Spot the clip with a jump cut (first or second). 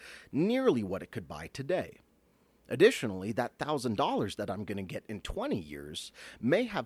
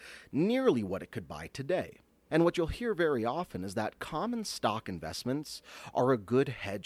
second